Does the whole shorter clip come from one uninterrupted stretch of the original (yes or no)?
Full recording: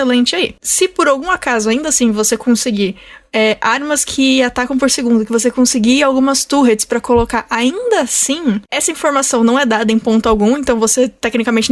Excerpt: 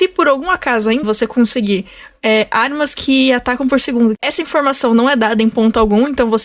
no